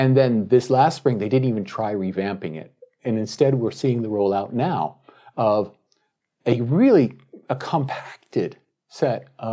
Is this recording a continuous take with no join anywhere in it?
yes; 0 cuts

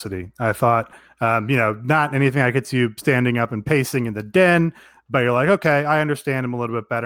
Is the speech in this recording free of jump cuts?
yes; 0 cuts

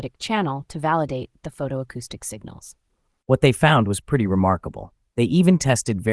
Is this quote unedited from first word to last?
no; 1 cut; at 5.1 s

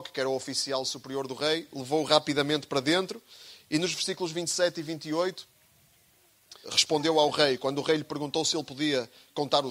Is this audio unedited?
no; 1 cut; at 6.6 s

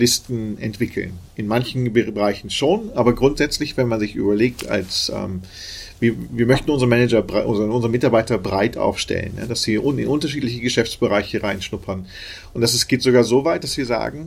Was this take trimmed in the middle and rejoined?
no; 0 cuts

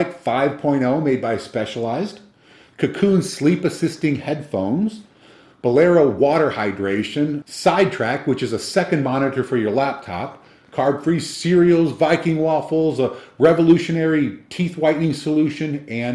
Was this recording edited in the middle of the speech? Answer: yes; 1 cut; at 7.4 s

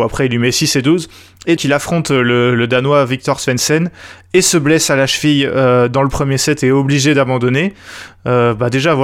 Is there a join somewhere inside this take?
yes; 1 cut; at 1.6 s

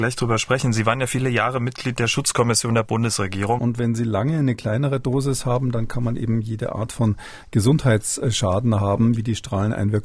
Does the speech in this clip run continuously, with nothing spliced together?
no; 2 cuts; at 3.6 s, 9.2 s

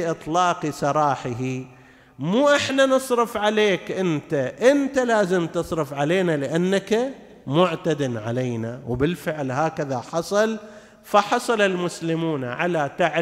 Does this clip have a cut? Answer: no; 0 cuts

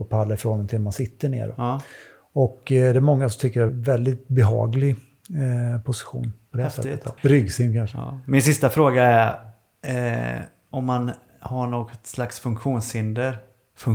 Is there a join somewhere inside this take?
yes; 2 cuts; at 3.7 s, 7.2 s

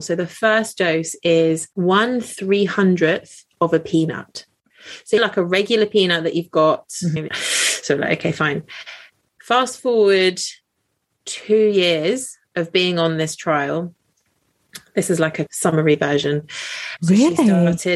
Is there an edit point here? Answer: yes; 3 cuts; at 1.7 s, 7.3 s, 17.0 s

